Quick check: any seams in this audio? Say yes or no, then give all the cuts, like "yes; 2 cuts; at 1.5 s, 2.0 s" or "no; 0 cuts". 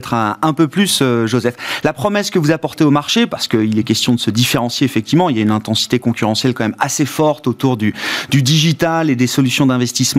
no; 0 cuts